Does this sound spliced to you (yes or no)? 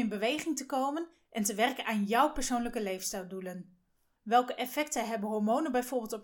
yes